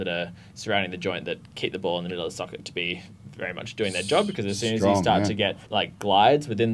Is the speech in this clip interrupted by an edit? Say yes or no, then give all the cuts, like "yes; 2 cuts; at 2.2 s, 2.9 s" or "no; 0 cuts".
yes; 1 cut; at 5.6 s